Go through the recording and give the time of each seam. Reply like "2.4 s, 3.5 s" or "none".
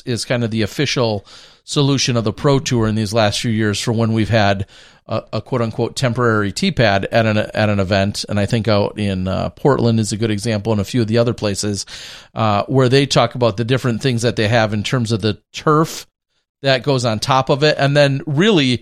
none